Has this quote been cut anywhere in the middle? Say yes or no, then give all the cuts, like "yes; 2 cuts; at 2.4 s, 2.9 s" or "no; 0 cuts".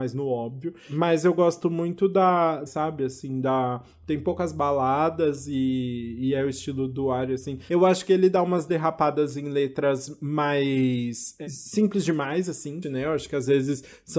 yes; 3 cuts; at 2.7 s, 7.7 s, 12.8 s